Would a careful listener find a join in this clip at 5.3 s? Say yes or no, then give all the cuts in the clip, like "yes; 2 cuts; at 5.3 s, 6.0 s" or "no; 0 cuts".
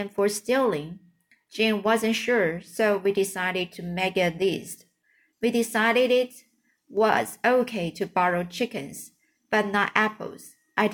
yes; 1 cut; at 5.3 s